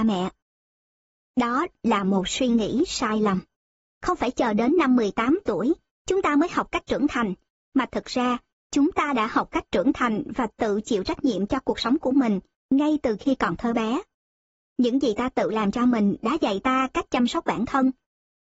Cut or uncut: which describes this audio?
uncut